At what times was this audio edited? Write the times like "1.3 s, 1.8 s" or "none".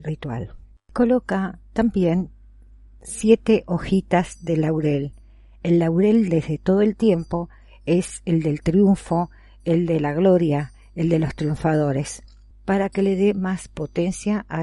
12.5 s